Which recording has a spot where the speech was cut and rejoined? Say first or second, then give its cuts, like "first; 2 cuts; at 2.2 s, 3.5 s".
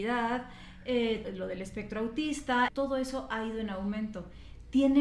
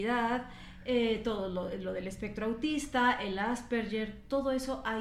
first; 2 cuts; at 1.2 s, 2.7 s